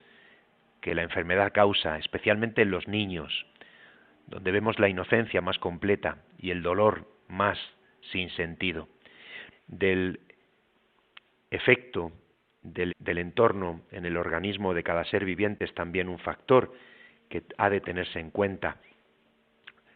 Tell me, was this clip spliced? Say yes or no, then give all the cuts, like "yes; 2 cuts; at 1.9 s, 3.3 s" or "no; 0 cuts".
yes; 2 cuts; at 9.5 s, 12.9 s